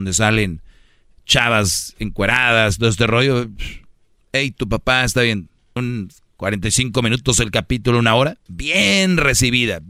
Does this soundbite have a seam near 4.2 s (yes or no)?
no